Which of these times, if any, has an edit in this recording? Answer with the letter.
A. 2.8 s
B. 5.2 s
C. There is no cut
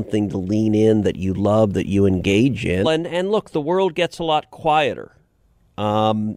A